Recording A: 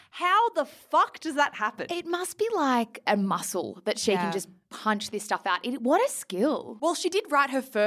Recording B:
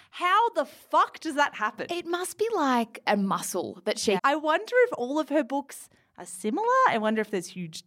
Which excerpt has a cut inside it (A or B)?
B